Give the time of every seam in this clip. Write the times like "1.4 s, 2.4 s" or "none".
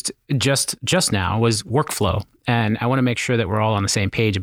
none